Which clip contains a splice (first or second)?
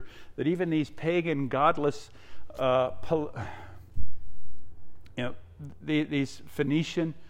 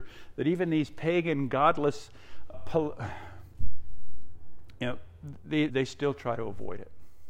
second